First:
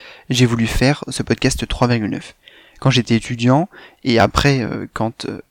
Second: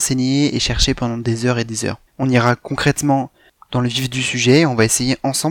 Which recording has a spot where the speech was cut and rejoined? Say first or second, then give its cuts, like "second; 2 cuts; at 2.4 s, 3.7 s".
second; 1 cut; at 2.1 s